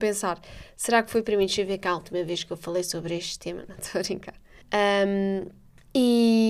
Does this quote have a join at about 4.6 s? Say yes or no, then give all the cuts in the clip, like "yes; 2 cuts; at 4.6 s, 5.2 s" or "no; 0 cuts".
yes; 1 cut; at 4.6 s